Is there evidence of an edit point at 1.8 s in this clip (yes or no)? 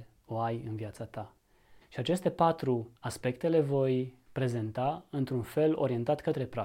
yes